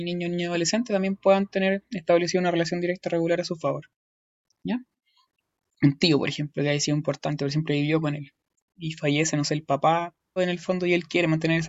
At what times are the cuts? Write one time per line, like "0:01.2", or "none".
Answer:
0:10.4